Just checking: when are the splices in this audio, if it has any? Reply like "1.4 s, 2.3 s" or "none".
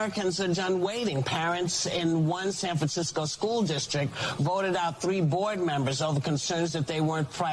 none